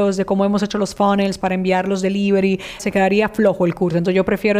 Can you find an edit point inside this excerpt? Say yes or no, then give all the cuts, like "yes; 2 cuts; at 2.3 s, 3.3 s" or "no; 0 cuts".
yes; 1 cut; at 2.8 s